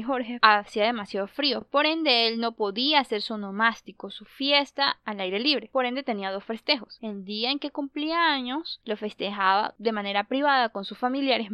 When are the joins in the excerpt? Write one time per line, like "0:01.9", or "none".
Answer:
none